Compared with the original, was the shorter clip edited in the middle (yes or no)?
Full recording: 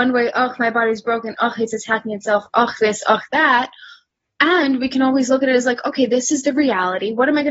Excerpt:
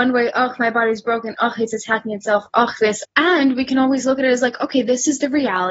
yes